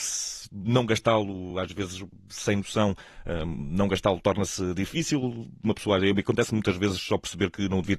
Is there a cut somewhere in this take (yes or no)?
no